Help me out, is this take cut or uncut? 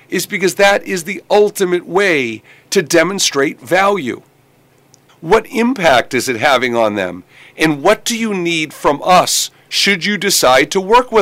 cut